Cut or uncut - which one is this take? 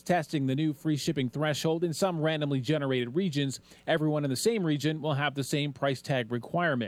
uncut